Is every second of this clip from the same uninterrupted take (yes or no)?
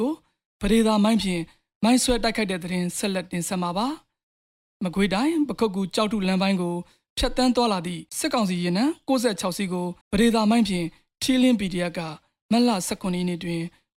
no